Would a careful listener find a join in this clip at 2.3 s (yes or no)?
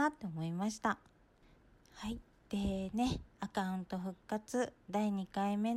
no